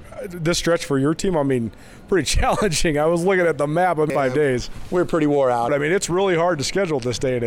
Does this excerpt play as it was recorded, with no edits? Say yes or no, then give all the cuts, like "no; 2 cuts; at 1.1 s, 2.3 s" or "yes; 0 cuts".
no; 2 cuts; at 4.1 s, 5.7 s